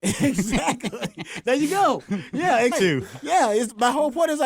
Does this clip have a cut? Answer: yes; 1 cut; at 2.7 s

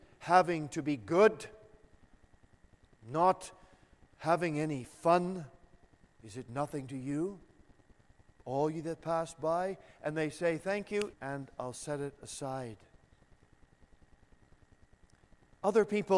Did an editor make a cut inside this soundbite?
yes; 2 cuts; at 6.1 s, 11.1 s

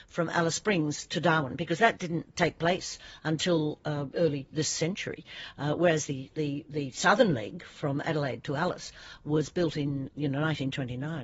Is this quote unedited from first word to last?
yes; 0 cuts

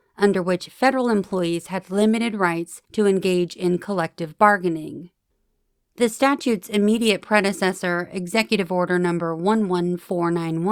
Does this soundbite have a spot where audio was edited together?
no; 0 cuts

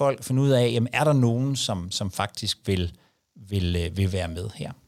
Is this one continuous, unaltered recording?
yes; 0 cuts

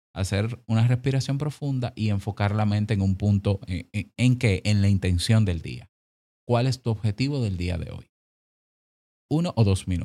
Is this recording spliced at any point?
yes; 1 cut; at 4.2 s

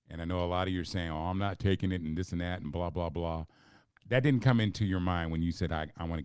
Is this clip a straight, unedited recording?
no; 1 cut; at 3.9 s

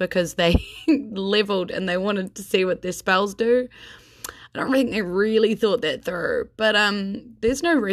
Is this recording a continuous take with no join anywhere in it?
yes; 0 cuts

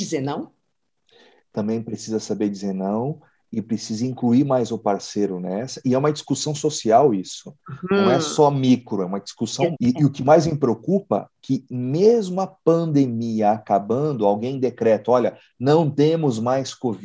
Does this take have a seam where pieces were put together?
yes; 1 cut; at 9.7 s

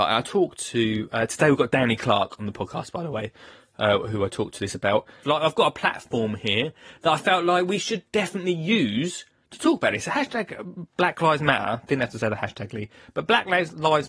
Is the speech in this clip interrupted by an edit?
yes; 1 cut; at 5.2 s

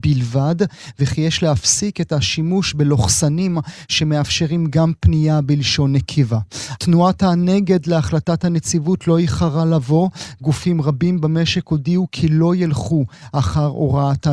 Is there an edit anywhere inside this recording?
yes; 1 cut; at 6.8 s

